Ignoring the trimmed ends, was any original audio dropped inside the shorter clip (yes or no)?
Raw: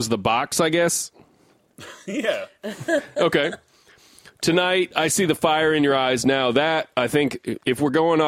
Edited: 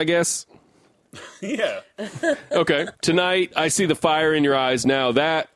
yes